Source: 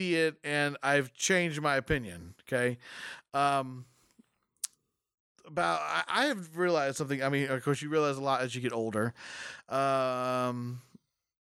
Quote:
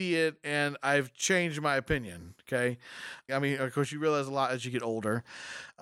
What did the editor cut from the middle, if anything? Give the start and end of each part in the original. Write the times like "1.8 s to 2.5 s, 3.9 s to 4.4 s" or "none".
3.3 s to 7.2 s